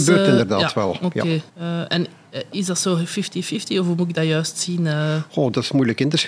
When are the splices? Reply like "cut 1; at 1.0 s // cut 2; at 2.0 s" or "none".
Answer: cut 1; at 1.5 s